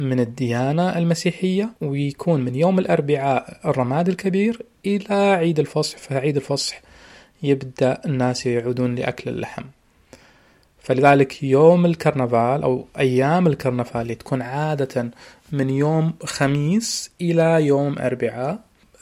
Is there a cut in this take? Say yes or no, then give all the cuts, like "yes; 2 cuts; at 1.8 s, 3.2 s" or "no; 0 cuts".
yes; 1 cut; at 1.8 s